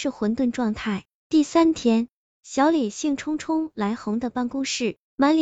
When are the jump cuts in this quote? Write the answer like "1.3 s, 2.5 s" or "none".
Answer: none